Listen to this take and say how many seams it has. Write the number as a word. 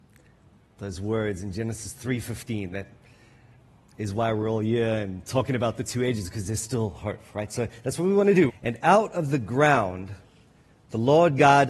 one